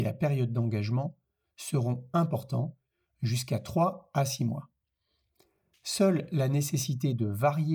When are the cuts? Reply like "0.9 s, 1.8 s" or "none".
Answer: none